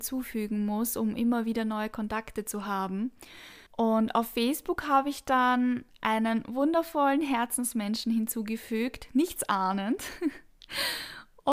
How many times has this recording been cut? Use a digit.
1